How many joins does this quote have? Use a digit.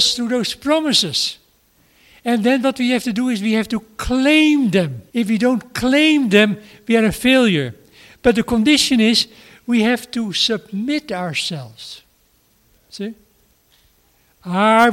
1